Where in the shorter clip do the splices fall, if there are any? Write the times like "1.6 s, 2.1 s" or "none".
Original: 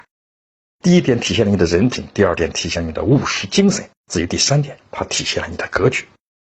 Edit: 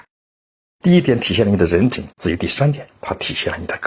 2.1 s